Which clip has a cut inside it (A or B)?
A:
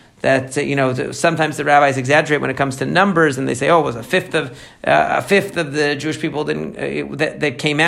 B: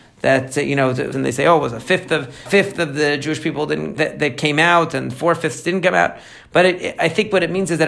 B